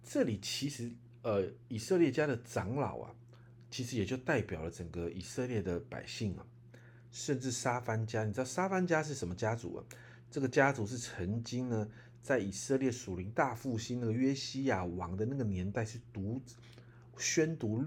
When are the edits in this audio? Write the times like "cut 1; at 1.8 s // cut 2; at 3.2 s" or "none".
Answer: none